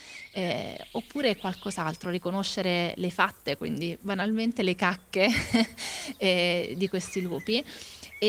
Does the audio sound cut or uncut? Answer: uncut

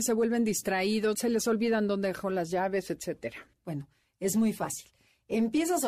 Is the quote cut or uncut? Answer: cut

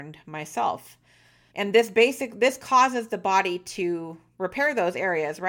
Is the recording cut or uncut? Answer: cut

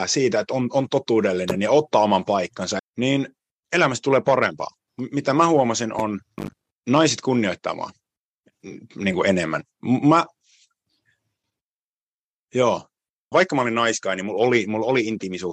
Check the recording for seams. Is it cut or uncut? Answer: cut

